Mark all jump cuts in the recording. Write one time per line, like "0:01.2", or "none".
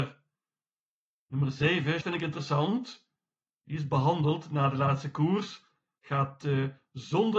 0:02.0

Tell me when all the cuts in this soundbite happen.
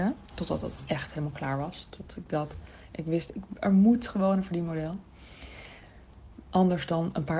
0:06.3

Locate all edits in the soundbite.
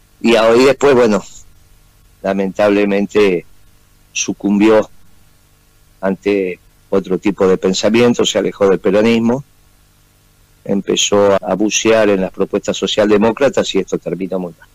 0:11.4

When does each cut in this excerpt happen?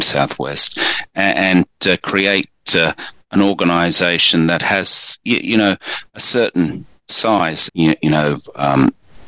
0:07.7

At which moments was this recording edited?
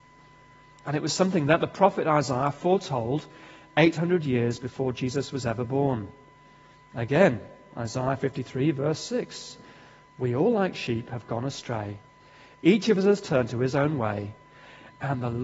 none

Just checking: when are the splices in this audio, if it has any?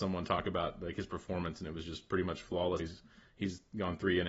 0:02.8

